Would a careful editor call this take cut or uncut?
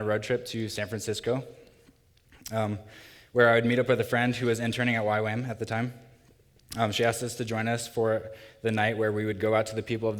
uncut